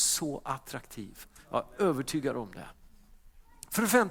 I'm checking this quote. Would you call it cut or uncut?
uncut